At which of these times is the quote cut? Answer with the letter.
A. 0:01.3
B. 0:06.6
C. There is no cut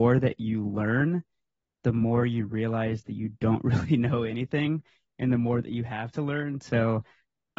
C